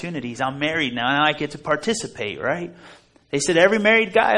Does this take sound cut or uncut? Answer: uncut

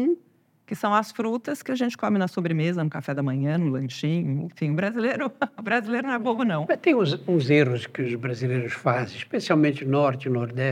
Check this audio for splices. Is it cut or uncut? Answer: uncut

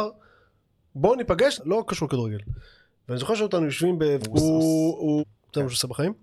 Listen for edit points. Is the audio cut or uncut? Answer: cut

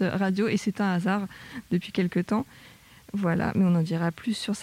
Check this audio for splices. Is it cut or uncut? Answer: uncut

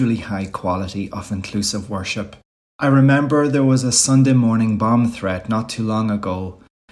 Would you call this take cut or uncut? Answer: cut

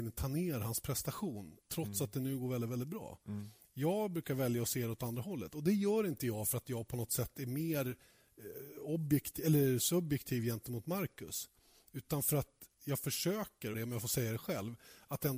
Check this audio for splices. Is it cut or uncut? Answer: cut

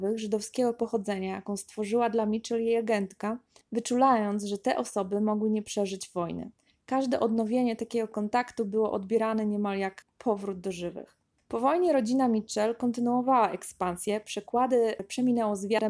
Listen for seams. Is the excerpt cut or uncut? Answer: uncut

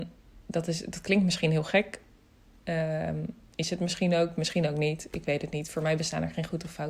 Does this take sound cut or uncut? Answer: uncut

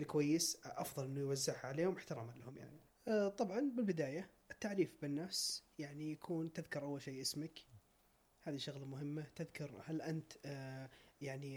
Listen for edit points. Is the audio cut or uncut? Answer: cut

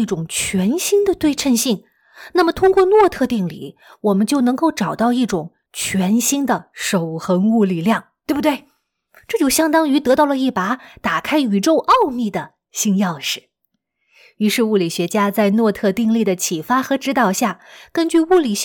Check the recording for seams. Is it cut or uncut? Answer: uncut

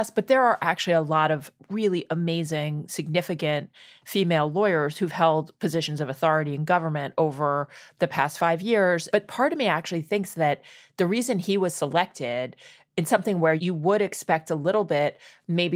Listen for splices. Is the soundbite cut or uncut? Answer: cut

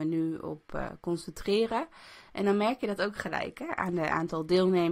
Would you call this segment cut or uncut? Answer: cut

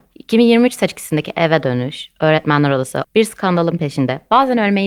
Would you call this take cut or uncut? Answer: cut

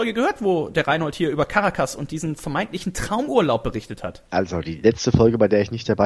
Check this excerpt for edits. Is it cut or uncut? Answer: cut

